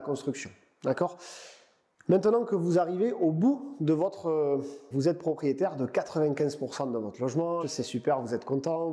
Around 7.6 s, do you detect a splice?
yes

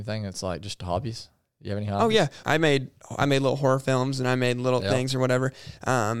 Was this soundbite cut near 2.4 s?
yes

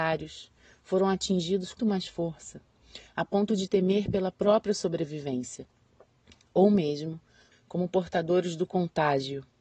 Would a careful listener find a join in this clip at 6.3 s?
no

